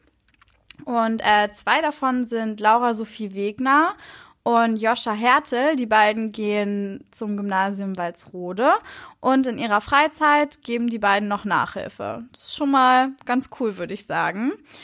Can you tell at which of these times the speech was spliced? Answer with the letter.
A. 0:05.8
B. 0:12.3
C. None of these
C